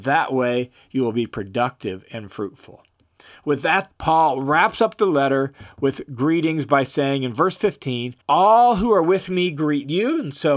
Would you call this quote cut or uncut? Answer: cut